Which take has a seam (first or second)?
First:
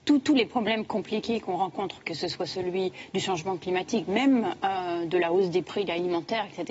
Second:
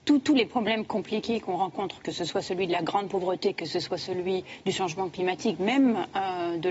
first